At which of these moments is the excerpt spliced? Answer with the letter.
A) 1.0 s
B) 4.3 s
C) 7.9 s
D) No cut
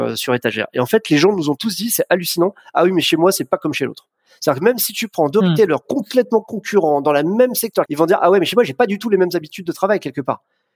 C